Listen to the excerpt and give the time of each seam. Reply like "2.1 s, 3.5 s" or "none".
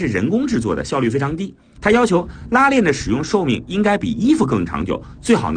1.8 s